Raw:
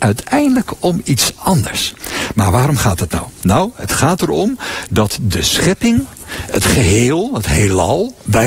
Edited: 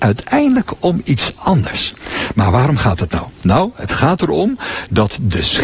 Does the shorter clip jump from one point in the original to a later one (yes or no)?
no